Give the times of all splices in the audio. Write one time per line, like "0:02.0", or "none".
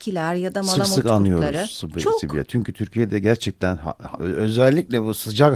none